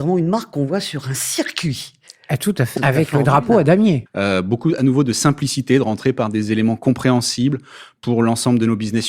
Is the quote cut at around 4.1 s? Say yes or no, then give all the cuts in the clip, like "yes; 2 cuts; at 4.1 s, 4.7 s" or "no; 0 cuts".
yes; 2 cuts; at 2.8 s, 4.1 s